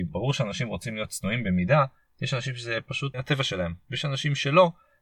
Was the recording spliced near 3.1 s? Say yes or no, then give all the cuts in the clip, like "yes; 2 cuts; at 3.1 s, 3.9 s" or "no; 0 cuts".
yes; 1 cut; at 3.1 s